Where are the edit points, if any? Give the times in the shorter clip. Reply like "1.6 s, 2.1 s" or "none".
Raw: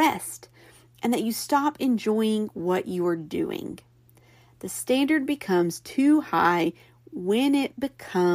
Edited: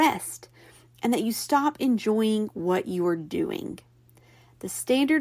none